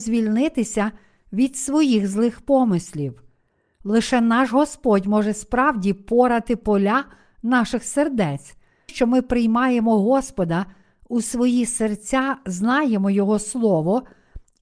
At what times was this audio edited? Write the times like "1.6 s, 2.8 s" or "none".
8.9 s